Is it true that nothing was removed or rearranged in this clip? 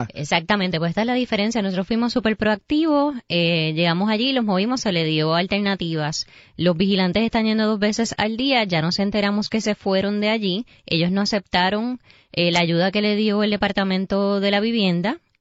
yes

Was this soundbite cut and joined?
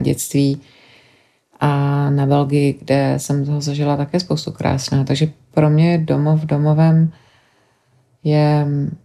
no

